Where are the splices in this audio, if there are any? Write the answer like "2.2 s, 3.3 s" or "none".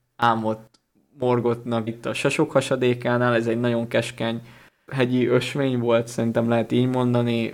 1.9 s

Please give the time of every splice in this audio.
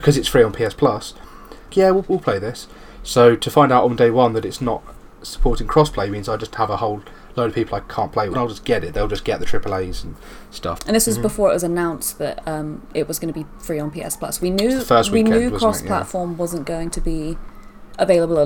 1.7 s, 8.3 s, 10.8 s

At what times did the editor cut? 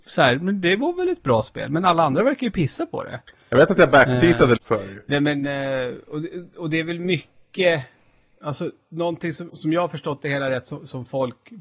4.6 s, 9.5 s

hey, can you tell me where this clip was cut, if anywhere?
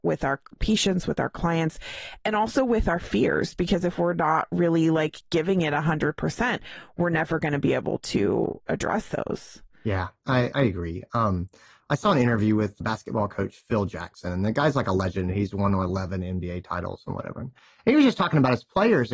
10.5 s, 12.8 s

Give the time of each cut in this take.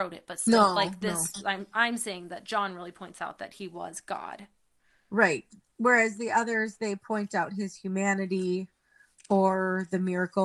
none

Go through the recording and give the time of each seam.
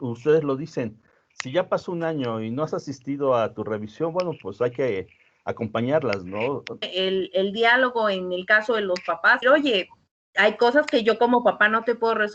6.8 s, 9.4 s

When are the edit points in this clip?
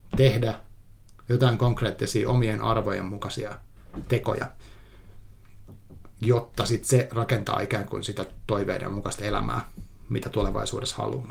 none

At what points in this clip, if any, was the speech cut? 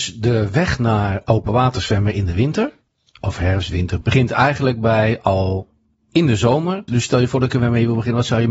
4.0 s, 6.9 s

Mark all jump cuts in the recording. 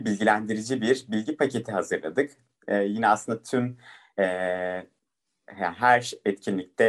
none

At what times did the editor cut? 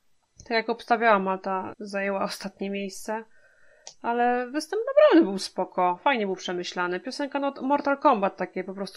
1.7 s

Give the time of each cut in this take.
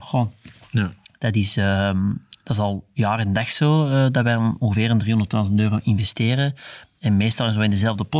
none

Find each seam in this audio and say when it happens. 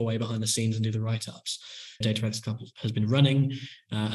2.0 s

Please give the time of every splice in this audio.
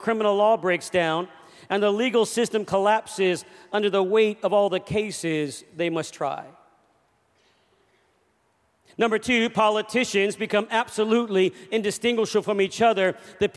none

